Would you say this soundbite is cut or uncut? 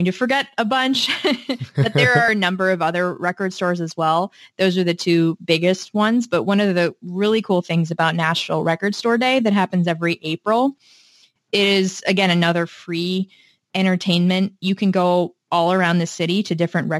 uncut